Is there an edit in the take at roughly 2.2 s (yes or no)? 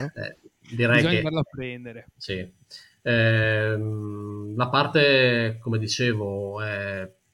yes